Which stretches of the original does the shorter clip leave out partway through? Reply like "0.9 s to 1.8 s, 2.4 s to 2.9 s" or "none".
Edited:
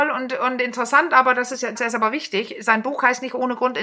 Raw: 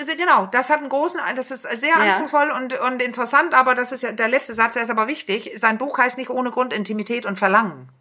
4.2 s to 4.7 s